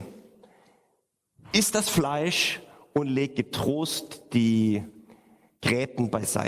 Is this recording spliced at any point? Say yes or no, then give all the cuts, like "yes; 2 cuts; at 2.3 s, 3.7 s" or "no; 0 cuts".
no; 0 cuts